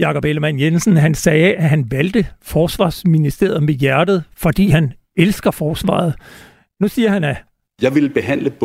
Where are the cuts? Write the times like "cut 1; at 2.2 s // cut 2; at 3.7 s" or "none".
none